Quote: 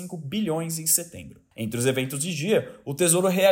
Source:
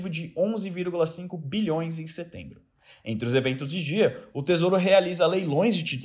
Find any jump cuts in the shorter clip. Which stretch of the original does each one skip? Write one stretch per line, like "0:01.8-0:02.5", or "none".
0:02.7-0:03.0